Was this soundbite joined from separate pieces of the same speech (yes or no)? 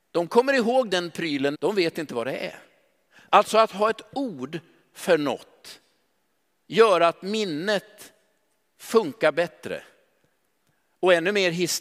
yes